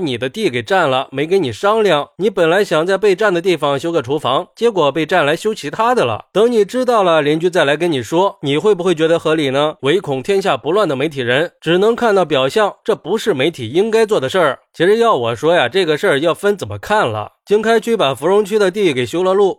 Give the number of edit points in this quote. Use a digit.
1